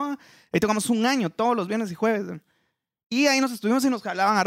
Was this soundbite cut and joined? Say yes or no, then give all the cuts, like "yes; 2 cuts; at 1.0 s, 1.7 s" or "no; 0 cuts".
no; 0 cuts